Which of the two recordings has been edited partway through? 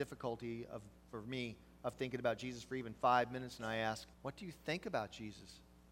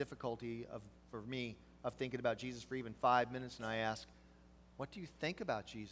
first; 1 cut; at 4.1 s

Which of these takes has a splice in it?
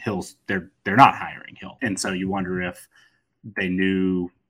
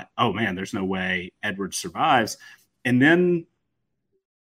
first; 1 cut; at 1.8 s

